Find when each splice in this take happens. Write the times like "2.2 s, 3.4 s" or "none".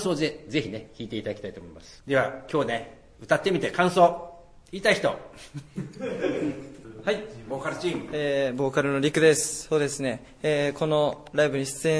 none